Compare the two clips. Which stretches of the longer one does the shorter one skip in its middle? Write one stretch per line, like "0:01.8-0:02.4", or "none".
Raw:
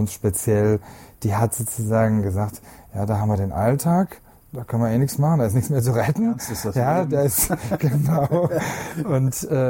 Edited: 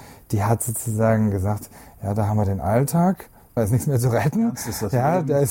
0:04.5-0:05.4